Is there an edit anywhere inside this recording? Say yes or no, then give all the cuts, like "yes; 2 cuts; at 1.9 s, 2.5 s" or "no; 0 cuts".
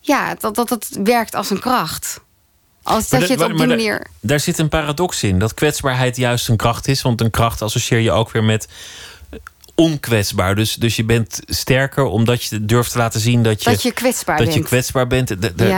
no; 0 cuts